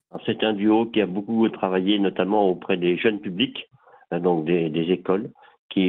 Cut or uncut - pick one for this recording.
uncut